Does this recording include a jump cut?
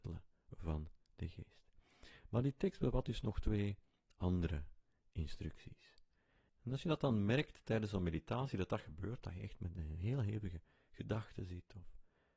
yes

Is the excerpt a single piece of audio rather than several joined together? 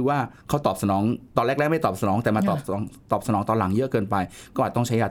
no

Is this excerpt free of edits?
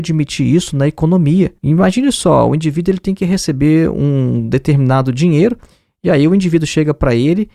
yes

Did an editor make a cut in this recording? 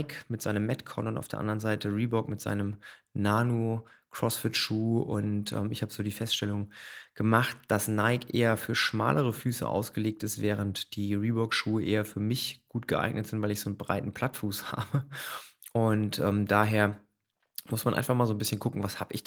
no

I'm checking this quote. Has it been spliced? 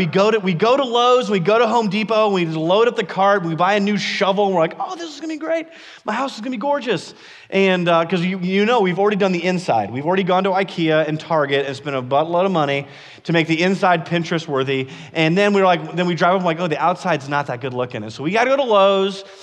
no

